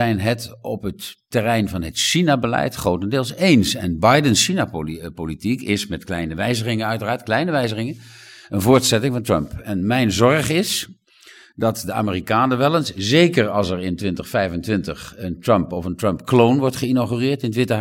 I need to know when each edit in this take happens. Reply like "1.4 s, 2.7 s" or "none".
none